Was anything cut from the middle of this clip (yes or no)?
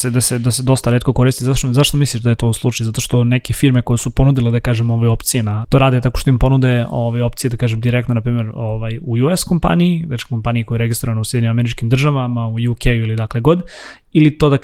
yes